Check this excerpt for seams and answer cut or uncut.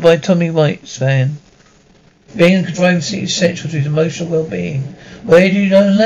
cut